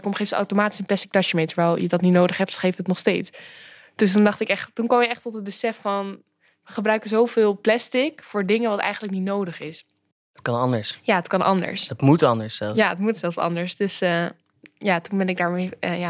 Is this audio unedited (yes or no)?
yes